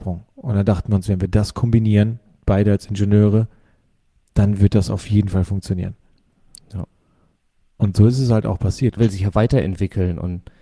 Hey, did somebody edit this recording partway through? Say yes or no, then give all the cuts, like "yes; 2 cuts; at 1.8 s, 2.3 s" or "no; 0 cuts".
yes; 1 cut; at 9.0 s